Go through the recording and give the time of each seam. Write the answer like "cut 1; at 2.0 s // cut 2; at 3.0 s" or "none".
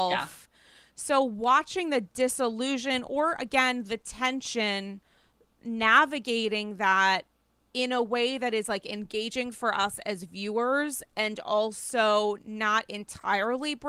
none